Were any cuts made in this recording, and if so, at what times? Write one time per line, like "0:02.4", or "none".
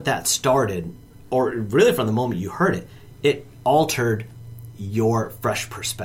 none